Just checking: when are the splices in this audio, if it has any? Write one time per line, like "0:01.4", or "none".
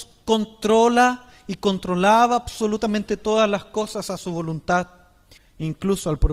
0:05.4

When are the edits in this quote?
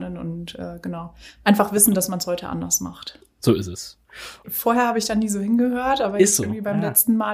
0:04.4

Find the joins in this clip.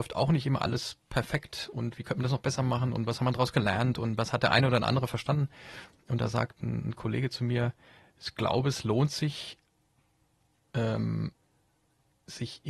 none

